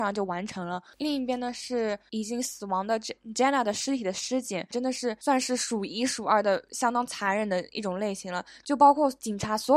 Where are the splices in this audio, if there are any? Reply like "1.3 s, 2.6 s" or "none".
4.7 s, 8.6 s

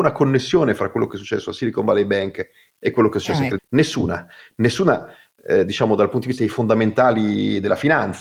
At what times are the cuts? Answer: 3.6 s

